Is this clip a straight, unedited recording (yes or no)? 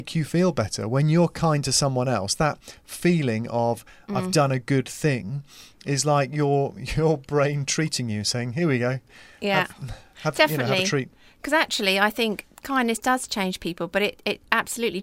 yes